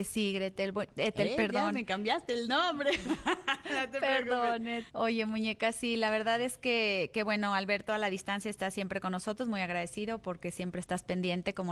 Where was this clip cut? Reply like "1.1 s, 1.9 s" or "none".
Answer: 4.9 s